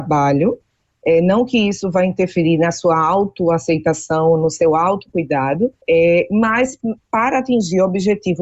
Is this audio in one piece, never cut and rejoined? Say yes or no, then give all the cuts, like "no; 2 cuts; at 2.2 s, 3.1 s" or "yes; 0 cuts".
no; 1 cut; at 5.8 s